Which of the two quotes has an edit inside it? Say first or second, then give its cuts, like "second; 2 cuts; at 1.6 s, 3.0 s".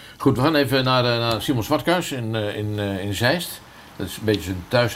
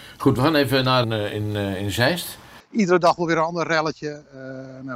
second; 2 cuts; at 1.0 s, 2.6 s